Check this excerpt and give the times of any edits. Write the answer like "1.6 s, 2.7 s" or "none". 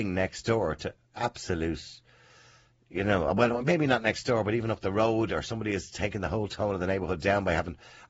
none